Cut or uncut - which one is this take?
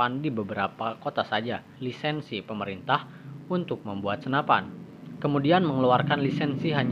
cut